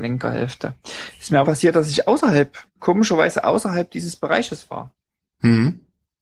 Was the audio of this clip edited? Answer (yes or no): yes